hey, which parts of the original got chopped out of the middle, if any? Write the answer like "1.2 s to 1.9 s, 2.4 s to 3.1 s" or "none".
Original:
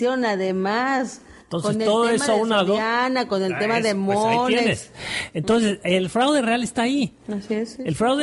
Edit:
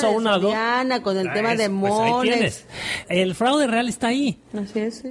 5.3 s to 5.8 s